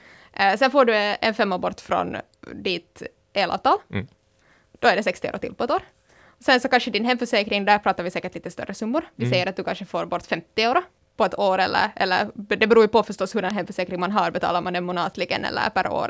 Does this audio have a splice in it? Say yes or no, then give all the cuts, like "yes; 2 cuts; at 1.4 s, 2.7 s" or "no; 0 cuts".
no; 0 cuts